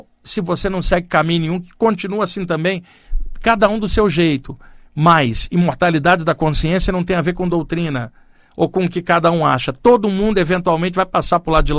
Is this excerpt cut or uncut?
uncut